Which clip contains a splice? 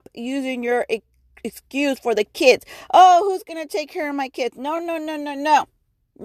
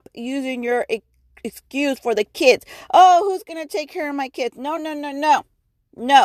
second; 1 cut; at 4.8 s

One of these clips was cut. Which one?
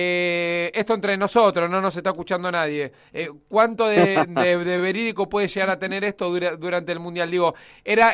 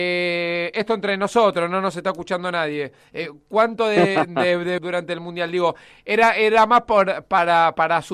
second; 1 cut; at 4.8 s

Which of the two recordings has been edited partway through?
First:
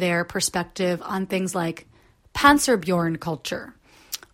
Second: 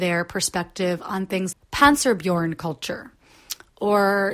second; 1 cut; at 1.5 s

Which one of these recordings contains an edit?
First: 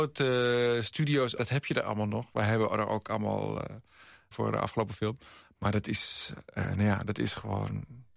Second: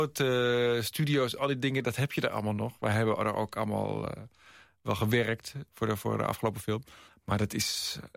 first; 2 cuts; at 1.4 s, 4.3 s

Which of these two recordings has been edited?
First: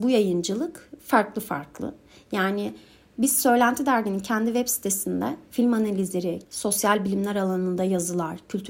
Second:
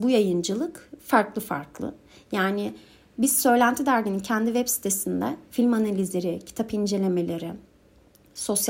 first; 1 cut; at 6.4 s

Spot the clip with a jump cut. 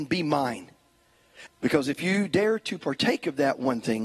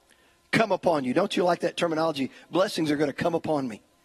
first; 1 cut; at 1.5 s

